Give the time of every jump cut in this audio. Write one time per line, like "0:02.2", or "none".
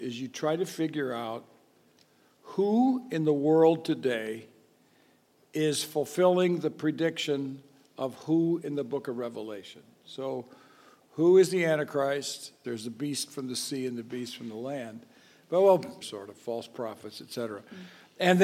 0:12.6
0:16.0